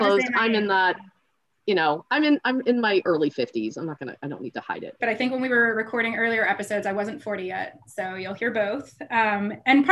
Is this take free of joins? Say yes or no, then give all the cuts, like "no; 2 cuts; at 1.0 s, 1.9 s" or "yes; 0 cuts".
no; 1 cut; at 5.0 s